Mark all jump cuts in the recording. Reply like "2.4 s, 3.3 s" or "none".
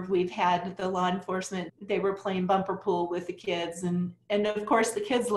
1.7 s